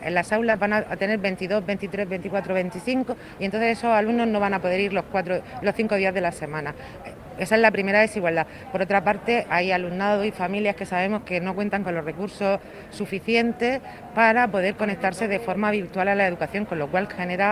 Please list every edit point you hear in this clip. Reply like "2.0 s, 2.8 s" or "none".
none